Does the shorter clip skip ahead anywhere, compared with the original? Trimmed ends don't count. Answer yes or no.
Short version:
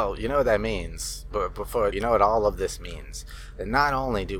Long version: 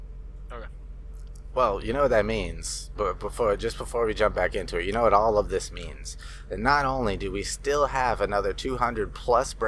yes